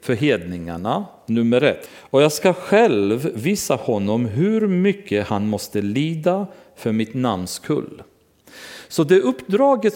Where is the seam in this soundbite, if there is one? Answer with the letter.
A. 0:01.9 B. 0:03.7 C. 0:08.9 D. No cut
A